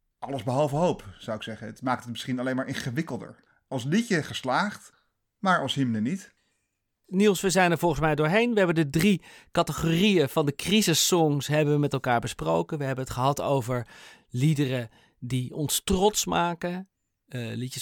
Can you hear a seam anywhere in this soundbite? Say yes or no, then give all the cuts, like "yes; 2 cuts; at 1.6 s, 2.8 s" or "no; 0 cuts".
no; 0 cuts